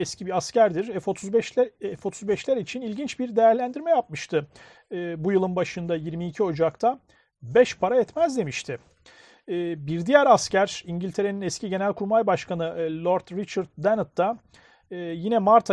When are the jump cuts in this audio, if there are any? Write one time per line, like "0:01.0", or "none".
none